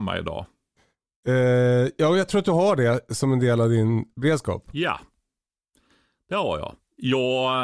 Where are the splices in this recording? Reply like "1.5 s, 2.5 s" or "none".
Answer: none